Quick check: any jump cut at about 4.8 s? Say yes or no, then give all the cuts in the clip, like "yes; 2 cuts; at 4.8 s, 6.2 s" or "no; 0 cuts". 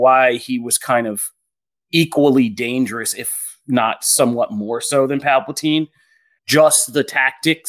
no; 1 cut; at 6.4 s